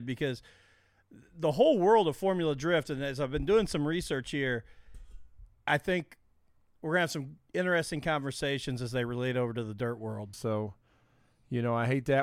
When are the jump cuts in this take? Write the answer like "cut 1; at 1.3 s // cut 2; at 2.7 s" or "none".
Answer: cut 1; at 5.7 s // cut 2; at 10.3 s